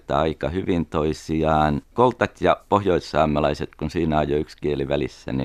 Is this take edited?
yes; 1 cut; at 1.9 s

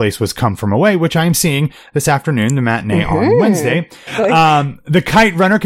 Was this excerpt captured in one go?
no; 1 cut; at 4.1 s

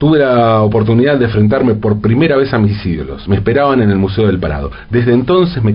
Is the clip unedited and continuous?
yes; 0 cuts

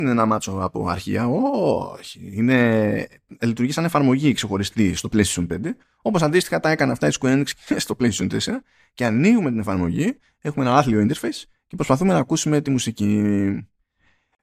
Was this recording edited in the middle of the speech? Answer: yes; 2 cuts; at 3.4 s, 5.0 s

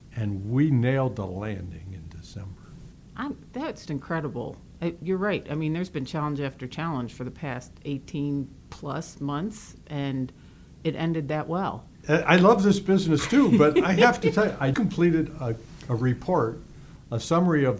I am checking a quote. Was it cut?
yes; 3 cuts; at 3.9 s, 12.0 s, 14.7 s

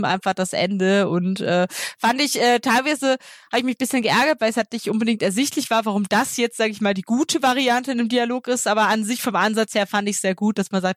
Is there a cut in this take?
no; 0 cuts

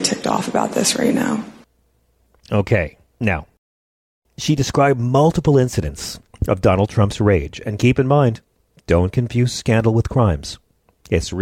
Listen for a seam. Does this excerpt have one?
no; 0 cuts

